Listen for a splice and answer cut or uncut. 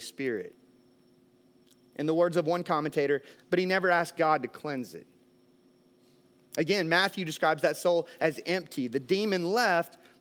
cut